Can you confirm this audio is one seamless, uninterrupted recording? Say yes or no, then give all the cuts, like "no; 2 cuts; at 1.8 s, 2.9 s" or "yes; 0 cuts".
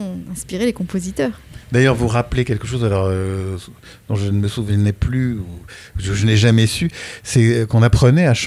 yes; 0 cuts